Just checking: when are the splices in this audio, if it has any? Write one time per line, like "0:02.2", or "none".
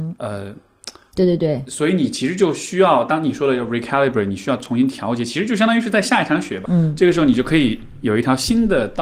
0:01.1
0:06.7